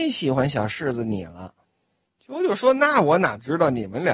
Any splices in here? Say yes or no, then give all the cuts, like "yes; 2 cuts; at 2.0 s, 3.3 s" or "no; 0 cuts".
yes; 1 cut; at 2.0 s